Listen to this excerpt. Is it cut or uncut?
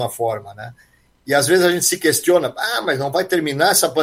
cut